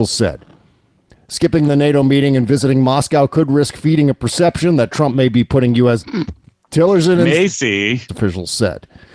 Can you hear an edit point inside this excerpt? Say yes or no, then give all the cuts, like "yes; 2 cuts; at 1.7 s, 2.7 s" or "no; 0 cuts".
yes; 2 cuts; at 6.0 s, 8.1 s